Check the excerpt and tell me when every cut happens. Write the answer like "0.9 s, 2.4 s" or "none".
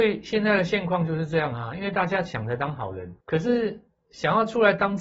3.2 s